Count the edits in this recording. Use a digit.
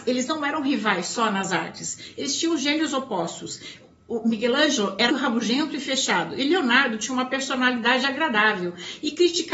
1